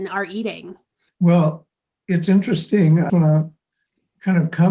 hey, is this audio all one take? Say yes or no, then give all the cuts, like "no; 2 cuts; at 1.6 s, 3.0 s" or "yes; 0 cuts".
no; 2 cuts; at 1.1 s, 3.1 s